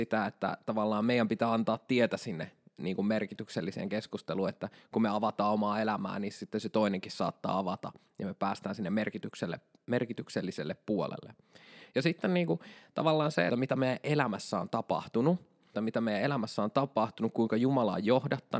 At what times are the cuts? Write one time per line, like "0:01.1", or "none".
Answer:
0:13.5
0:15.7